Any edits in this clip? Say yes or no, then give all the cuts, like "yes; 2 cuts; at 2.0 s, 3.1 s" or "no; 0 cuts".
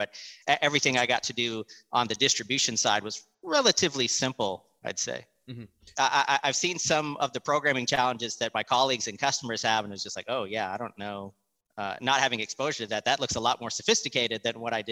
yes; 1 cut; at 5.9 s